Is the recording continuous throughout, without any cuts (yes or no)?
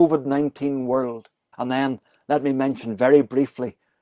no